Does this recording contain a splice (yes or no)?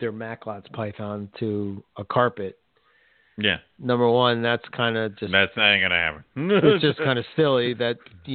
no